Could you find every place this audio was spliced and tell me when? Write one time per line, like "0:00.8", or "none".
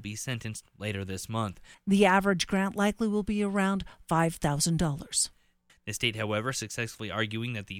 0:01.7
0:05.7